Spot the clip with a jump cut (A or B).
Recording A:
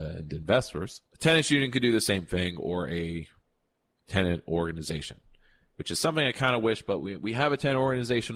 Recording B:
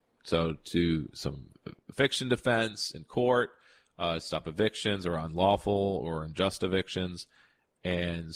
A